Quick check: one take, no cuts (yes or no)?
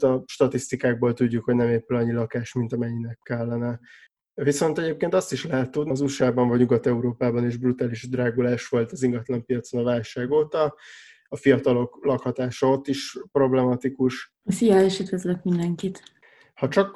no